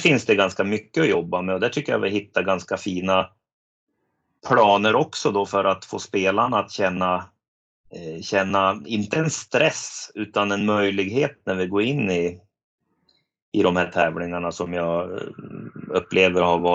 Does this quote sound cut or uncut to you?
uncut